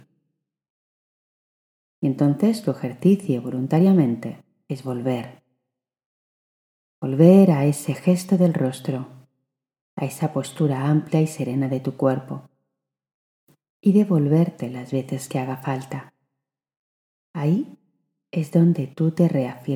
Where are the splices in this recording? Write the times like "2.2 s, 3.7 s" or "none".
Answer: none